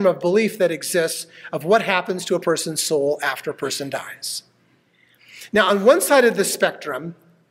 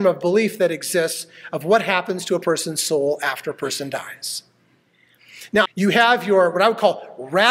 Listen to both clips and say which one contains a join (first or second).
second